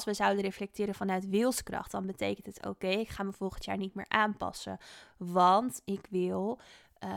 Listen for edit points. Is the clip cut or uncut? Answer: uncut